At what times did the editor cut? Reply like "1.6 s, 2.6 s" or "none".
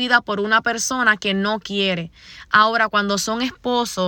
none